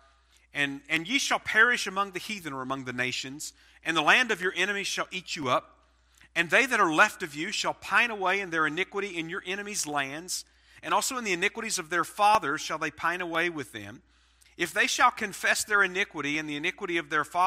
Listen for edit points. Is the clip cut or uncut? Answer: uncut